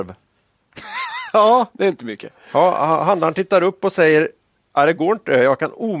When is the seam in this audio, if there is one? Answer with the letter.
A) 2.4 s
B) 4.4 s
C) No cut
C